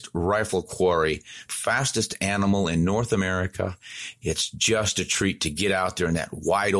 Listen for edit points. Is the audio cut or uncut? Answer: cut